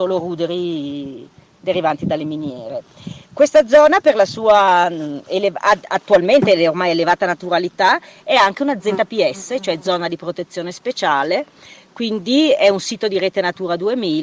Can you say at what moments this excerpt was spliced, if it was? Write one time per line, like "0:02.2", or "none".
none

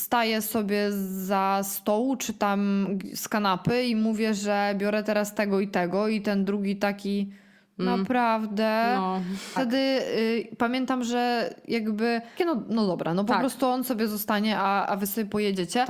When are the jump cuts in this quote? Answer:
0:09.6
0:12.4

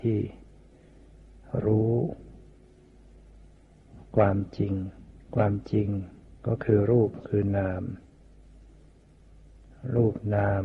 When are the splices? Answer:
0:05.2
0:06.4

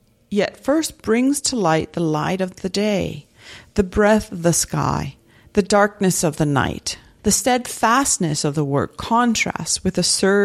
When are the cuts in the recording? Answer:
0:07.2

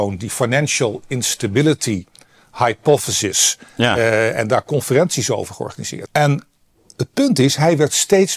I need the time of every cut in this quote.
0:06.1

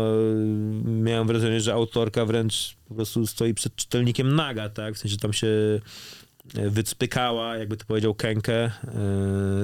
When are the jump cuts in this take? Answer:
none

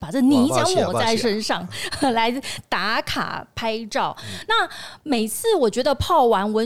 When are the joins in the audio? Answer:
none

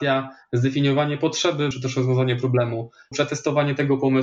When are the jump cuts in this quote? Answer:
0:01.7
0:03.1

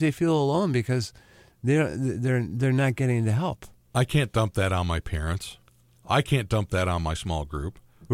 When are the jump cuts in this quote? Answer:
none

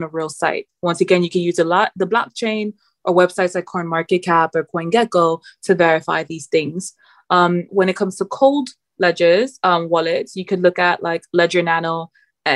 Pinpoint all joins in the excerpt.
0:07.7

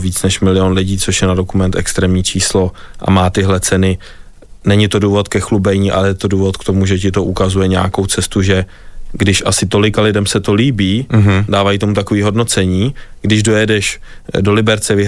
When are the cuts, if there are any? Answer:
none

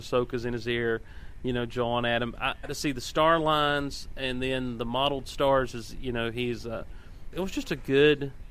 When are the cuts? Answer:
0:02.6
0:07.3

